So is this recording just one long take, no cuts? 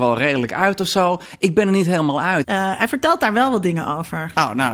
no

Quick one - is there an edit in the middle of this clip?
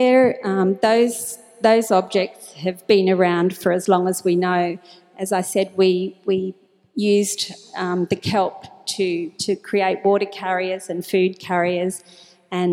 no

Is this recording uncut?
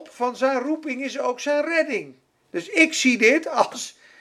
yes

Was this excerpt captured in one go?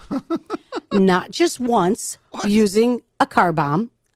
no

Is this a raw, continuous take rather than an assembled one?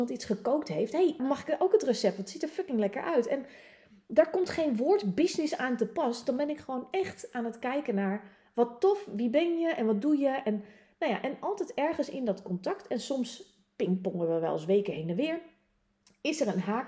no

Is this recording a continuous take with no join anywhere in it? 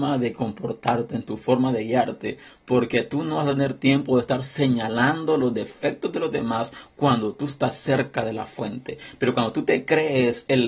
yes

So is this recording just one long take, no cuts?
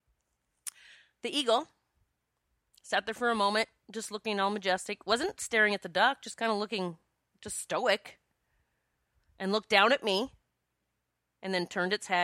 yes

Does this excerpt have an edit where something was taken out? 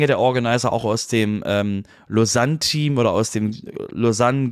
no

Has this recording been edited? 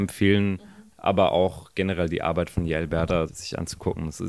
yes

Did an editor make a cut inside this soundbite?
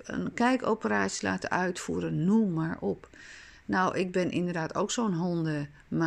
no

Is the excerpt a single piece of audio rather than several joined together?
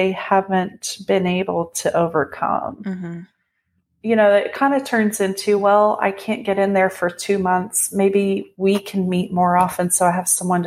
yes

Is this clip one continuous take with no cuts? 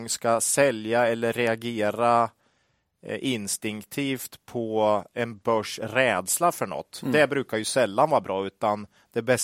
yes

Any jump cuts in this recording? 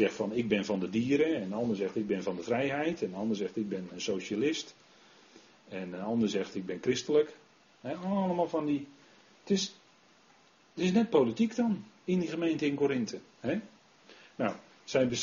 no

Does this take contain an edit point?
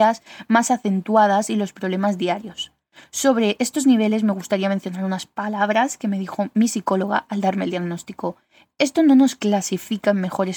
no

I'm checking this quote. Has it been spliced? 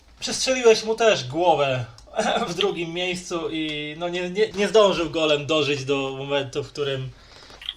yes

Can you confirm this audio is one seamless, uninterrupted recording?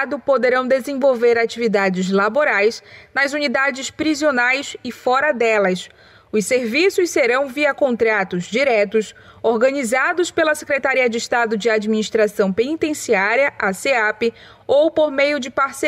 yes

